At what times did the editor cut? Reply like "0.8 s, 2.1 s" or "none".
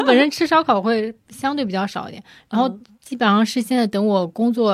none